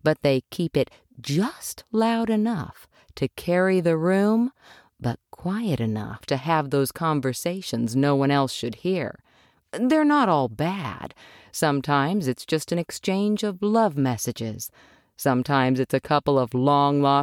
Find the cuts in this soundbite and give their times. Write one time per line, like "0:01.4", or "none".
none